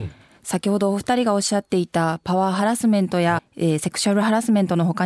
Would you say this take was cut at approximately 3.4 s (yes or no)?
yes